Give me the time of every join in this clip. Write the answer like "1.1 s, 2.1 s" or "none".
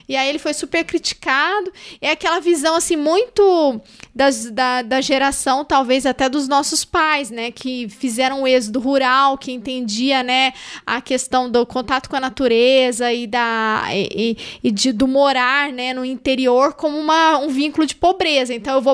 none

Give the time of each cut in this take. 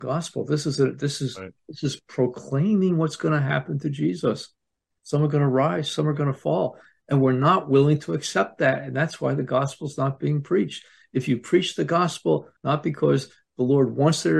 5.0 s, 12.6 s

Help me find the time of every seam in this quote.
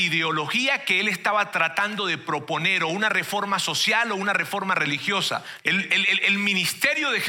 5.6 s

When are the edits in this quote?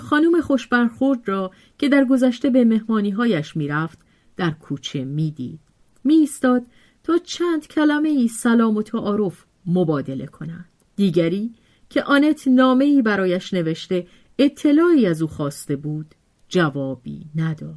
10.8 s

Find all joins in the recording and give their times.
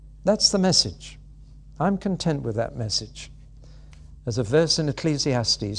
4.2 s

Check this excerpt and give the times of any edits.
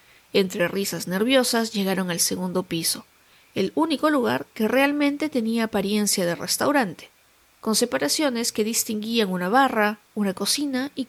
none

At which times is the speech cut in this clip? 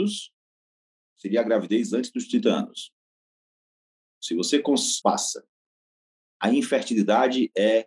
5.0 s

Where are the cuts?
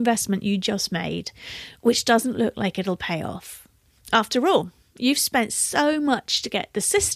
none

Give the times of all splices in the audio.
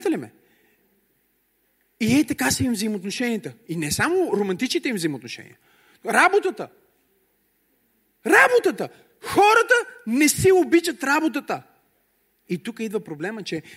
12.4 s

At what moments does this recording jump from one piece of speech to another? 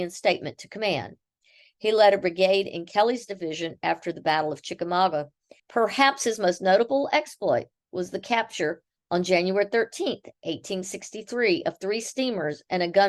5.6 s

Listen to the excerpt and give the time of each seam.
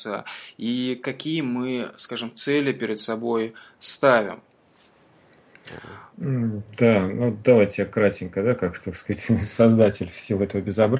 none

